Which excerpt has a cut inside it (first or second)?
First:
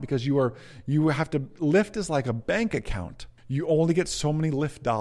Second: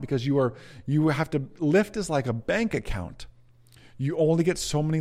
first